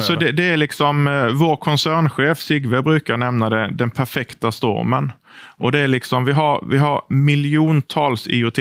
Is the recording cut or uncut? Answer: uncut